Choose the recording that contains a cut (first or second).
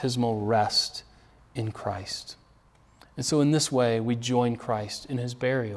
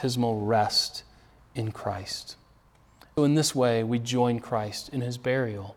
second